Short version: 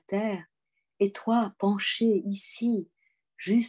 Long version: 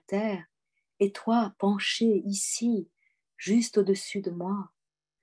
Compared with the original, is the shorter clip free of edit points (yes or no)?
yes